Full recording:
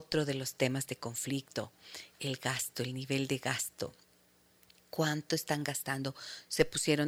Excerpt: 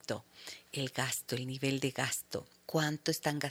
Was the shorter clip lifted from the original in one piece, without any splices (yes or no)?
no